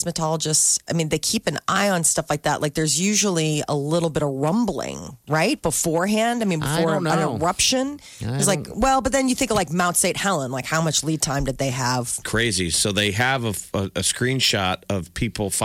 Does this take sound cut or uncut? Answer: cut